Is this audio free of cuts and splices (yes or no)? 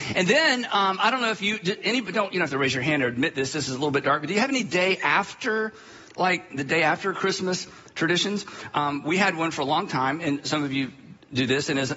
yes